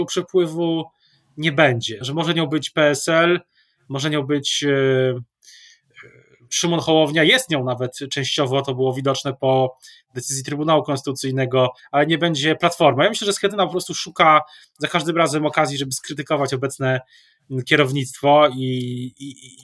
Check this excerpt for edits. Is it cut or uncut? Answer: cut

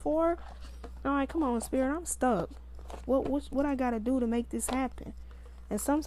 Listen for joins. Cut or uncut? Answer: uncut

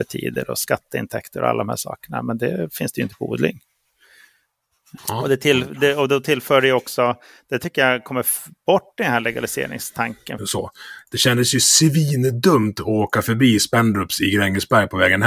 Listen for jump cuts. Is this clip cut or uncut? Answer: cut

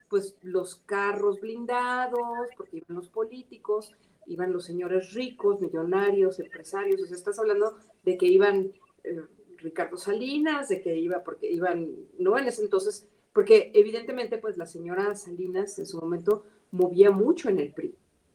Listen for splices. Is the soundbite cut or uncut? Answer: uncut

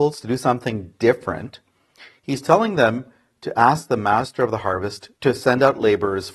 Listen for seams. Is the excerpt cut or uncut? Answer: cut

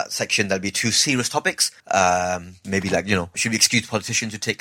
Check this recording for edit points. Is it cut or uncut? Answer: cut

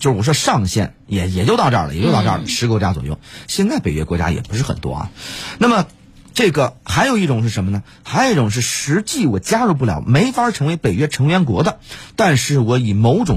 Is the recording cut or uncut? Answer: uncut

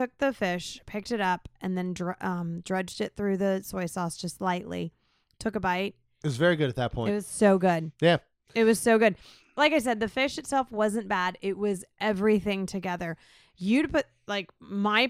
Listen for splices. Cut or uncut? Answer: cut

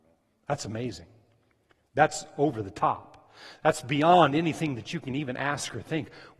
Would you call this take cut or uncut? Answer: uncut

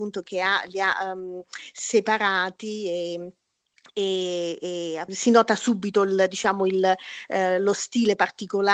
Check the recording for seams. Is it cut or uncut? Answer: cut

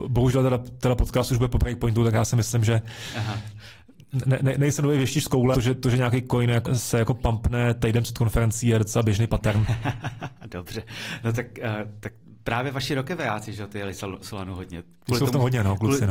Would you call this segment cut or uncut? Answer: cut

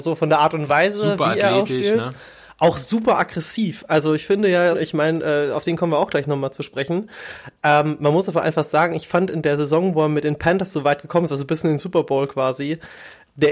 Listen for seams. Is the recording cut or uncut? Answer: cut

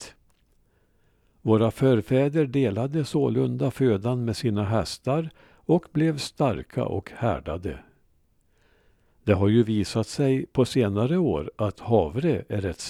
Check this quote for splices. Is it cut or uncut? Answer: cut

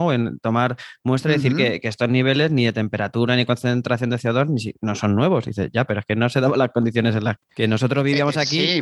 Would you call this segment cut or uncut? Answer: cut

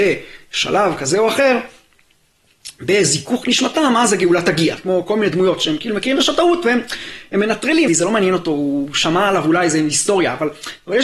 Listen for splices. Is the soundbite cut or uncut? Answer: cut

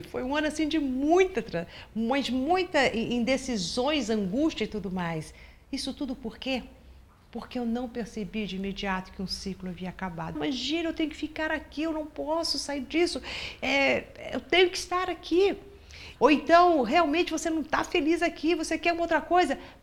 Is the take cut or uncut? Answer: cut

